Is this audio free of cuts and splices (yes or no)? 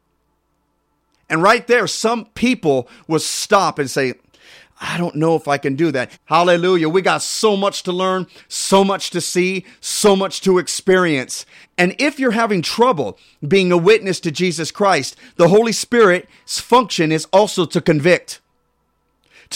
no